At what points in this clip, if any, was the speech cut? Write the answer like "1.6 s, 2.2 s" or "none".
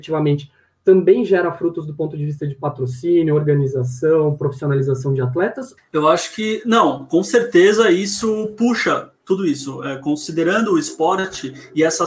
5.8 s